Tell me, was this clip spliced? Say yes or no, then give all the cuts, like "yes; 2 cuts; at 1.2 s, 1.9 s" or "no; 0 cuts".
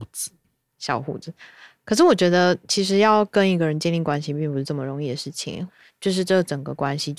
yes; 1 cut; at 5.7 s